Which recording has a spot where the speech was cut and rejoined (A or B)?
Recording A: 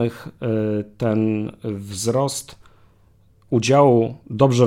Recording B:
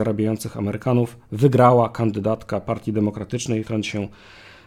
B